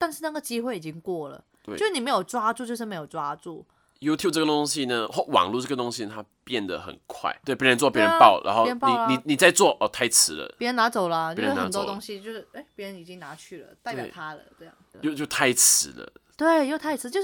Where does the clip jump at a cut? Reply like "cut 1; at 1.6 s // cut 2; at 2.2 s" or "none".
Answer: cut 1; at 7.4 s // cut 2; at 14.9 s

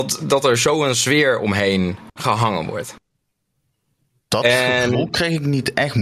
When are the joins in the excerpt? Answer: none

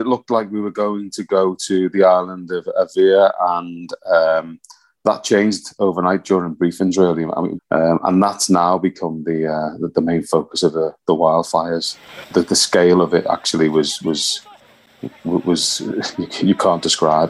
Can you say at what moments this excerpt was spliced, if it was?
cut 1; at 7.6 s // cut 2; at 12.2 s

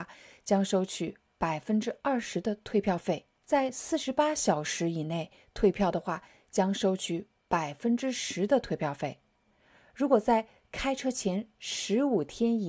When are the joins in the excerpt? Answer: cut 1; at 3.4 s

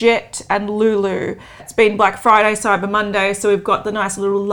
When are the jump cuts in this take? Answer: cut 1; at 1.6 s

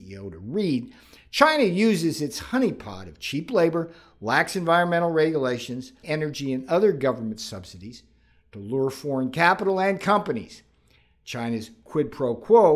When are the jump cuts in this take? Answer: cut 1; at 6.0 s

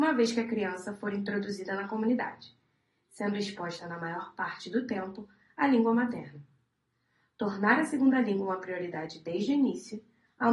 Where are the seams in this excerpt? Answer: none

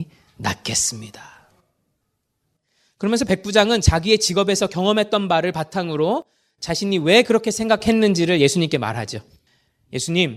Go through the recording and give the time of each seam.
none

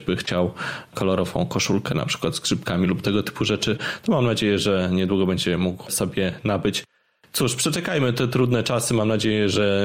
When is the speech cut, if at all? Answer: none

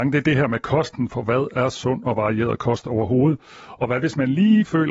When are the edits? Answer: none

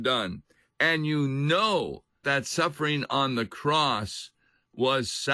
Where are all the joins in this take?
cut 1; at 2.2 s

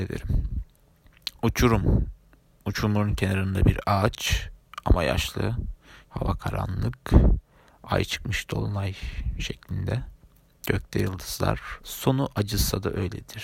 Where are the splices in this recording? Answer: cut 1; at 6.0 s // cut 2; at 11.8 s

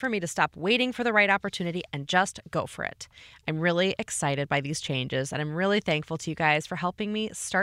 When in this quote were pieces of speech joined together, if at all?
none

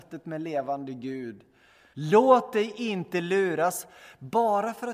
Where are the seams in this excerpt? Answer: cut 1; at 1.9 s

